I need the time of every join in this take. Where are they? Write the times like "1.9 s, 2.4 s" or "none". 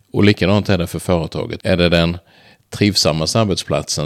1.6 s